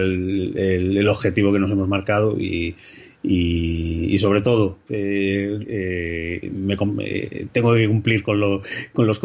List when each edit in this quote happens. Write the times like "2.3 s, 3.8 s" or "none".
5.6 s